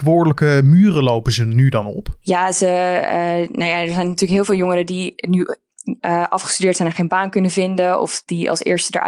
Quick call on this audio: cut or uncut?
uncut